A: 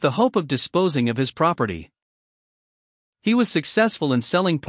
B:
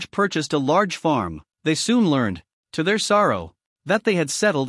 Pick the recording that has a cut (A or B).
B